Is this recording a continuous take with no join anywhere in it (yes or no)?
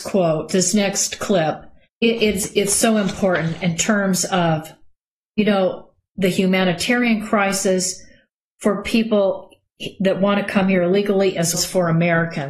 no